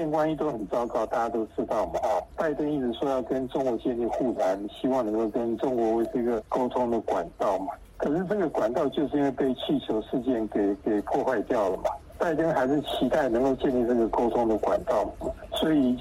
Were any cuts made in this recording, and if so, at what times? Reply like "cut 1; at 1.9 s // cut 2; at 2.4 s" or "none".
none